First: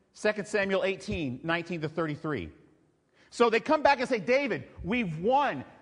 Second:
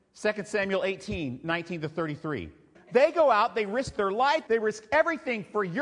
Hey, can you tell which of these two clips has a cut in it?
second; 2 cuts; at 2.7 s, 4.5 s

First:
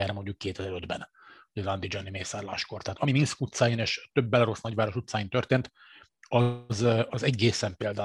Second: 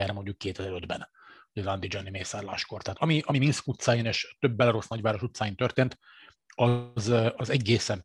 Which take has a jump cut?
first; 1 cut; at 3.0 s

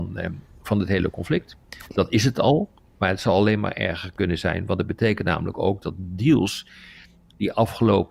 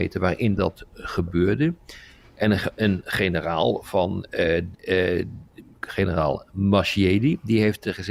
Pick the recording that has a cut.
second; 1 cut; at 4.7 s

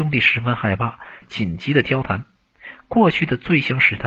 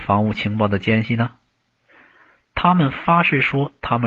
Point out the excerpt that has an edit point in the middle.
first; 1 cut; at 1.2 s

